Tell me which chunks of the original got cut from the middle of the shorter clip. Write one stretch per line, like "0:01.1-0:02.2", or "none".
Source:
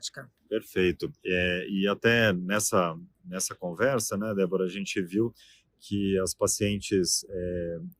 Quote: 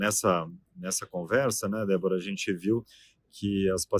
none